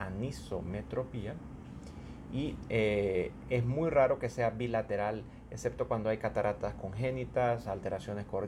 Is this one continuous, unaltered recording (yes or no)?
yes